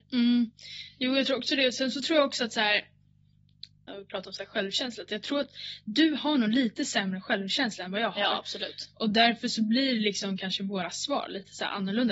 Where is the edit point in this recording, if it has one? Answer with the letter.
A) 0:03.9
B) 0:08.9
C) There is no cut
A